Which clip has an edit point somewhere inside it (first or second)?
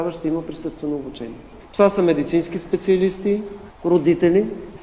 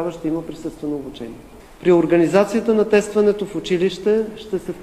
first